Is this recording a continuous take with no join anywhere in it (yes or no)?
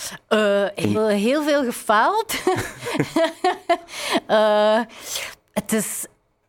no